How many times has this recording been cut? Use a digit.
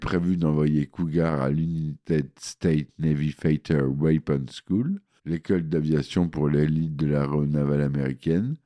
1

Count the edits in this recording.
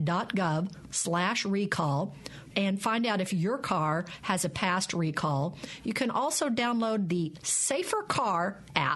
1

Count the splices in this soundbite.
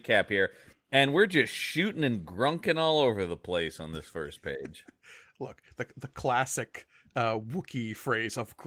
0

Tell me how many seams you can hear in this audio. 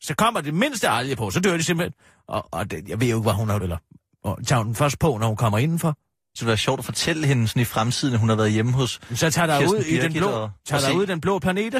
2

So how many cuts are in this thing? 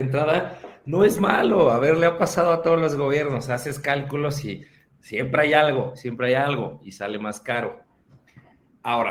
0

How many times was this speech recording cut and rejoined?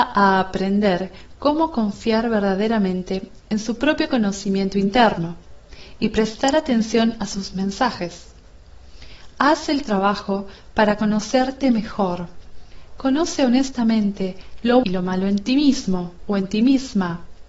1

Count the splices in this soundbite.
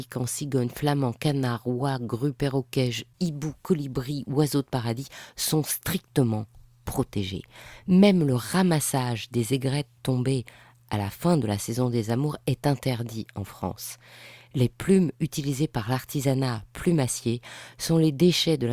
0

